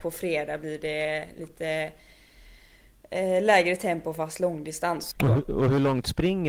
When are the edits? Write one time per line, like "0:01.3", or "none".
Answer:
0:05.1

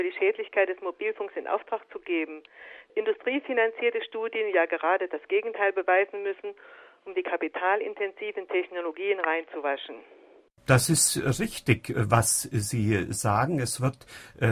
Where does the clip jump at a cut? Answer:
none

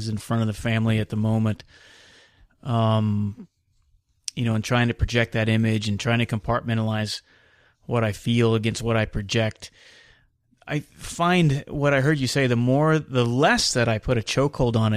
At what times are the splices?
none

